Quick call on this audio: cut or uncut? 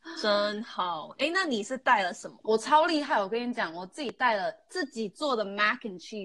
uncut